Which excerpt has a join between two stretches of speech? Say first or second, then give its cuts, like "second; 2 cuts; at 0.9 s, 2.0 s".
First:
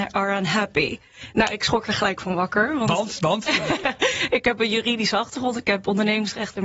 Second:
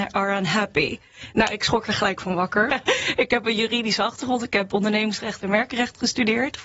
second; 1 cut; at 2.7 s